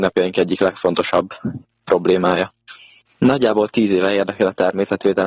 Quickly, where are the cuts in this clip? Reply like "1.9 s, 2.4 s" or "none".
3.0 s